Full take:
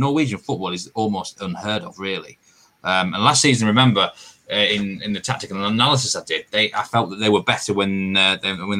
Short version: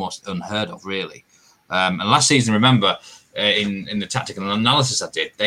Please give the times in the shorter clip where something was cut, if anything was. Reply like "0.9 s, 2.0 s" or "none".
none